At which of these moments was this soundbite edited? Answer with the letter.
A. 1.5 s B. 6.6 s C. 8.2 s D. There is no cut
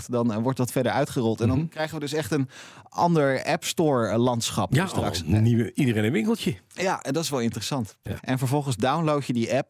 C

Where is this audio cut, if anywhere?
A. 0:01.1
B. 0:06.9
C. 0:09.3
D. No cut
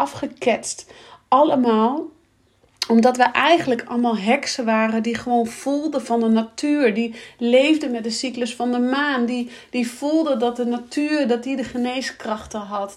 D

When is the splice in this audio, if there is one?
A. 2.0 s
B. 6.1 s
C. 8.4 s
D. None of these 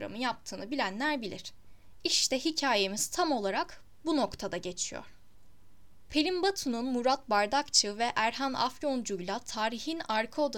B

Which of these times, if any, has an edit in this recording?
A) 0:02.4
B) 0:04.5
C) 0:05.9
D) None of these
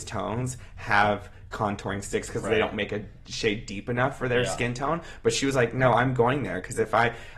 A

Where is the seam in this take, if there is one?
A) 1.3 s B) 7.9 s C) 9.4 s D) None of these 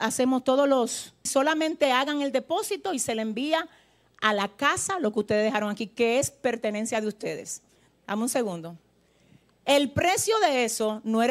A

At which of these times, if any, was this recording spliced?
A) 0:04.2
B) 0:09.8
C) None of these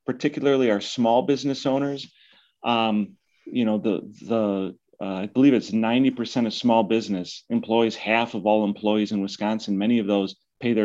C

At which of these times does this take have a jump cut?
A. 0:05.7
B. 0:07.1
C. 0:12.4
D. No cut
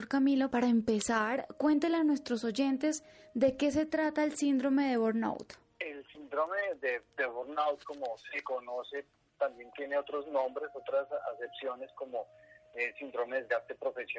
D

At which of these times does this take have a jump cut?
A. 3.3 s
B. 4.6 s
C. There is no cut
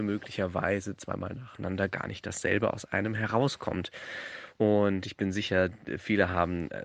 B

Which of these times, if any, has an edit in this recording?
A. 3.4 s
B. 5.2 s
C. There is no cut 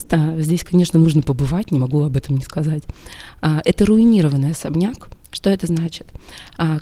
C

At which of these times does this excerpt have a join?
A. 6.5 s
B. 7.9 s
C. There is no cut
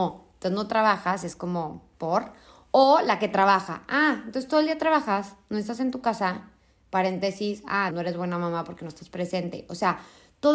B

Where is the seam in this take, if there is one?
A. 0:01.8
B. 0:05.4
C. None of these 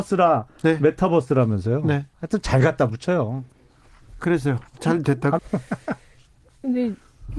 B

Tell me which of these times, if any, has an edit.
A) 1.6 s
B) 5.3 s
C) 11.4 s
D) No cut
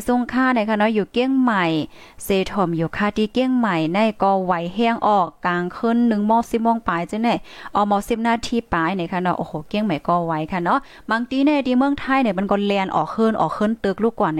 D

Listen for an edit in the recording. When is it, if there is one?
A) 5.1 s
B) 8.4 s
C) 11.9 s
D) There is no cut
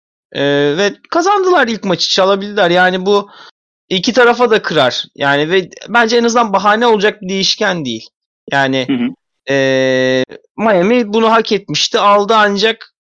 D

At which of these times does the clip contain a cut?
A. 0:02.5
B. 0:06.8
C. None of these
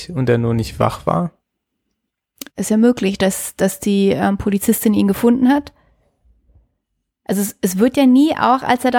A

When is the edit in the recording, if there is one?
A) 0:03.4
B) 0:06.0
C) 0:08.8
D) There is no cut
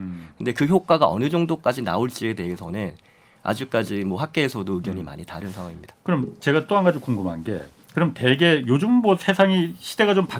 D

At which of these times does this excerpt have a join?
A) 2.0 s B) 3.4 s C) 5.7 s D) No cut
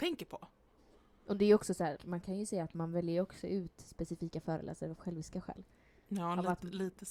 A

